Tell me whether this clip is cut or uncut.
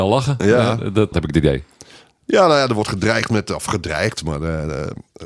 cut